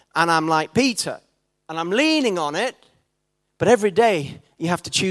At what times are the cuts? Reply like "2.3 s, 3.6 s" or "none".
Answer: none

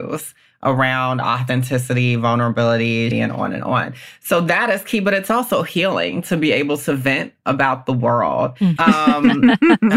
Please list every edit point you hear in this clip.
3.1 s, 8.8 s

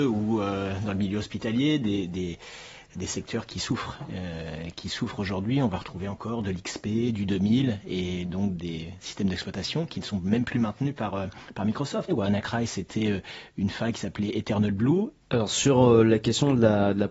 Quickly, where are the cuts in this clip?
12.1 s, 15.2 s

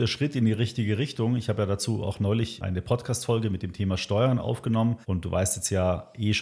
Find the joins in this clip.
5.0 s

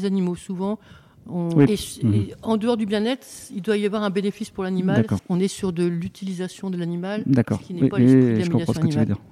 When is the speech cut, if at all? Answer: 1.7 s, 5.2 s

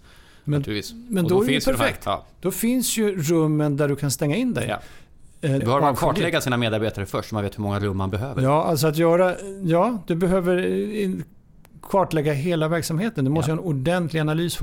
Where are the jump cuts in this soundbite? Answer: 5.6 s

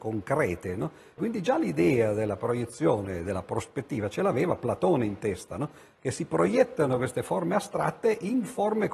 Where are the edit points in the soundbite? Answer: 1.2 s

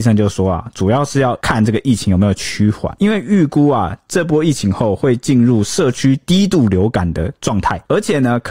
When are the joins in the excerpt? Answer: none

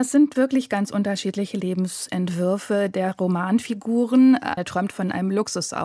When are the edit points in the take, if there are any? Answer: 4.6 s

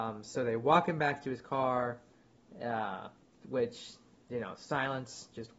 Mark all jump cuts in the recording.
none

